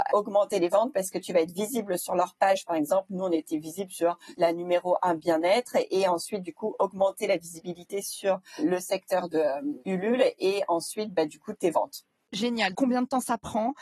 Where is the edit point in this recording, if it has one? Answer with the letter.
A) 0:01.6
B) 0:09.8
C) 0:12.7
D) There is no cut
C